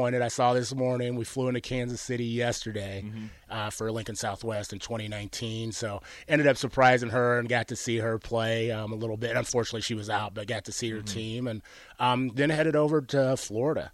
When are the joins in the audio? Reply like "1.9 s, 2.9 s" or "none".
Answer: 3.4 s